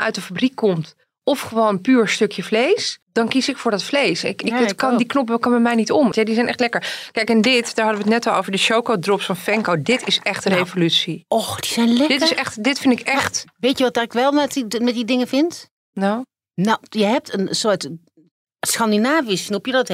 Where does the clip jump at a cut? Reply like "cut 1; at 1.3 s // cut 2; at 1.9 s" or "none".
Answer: cut 1; at 3.0 s // cut 2; at 6.1 s

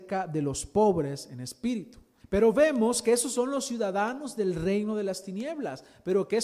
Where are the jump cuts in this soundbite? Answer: cut 1; at 2.2 s

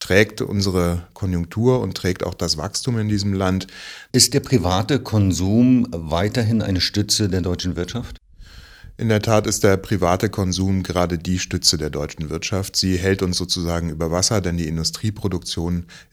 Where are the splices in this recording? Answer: cut 1; at 4.1 s

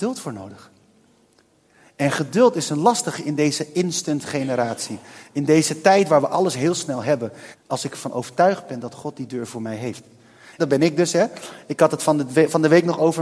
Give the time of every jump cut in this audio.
cut 1; at 7.5 s // cut 2; at 10.6 s

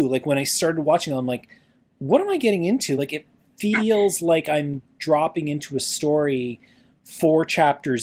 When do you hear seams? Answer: none

